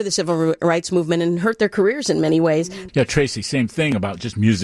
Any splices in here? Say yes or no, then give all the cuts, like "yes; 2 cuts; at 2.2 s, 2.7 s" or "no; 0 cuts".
yes; 1 cut; at 2.9 s